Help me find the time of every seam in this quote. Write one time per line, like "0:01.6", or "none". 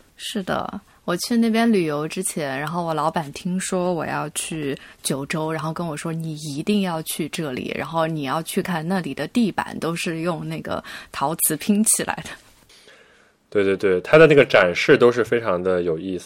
0:08.6